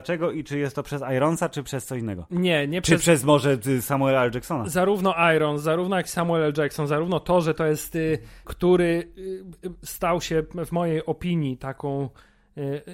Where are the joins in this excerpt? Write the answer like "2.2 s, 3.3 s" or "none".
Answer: 1.6 s, 8.4 s